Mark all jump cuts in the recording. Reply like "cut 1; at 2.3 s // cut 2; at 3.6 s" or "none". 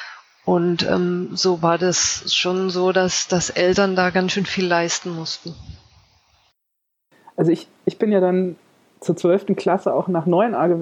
none